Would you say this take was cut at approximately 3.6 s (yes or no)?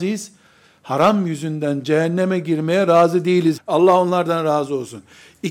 yes